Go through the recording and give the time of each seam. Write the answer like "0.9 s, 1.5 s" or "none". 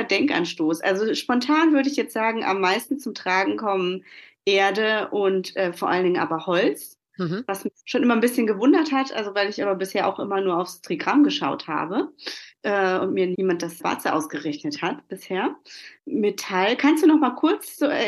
none